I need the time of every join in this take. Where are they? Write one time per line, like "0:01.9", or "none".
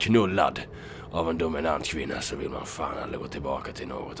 none